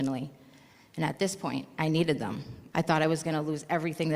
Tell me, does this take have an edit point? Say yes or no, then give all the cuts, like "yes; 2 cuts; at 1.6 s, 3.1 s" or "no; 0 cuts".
yes; 1 cut; at 2.7 s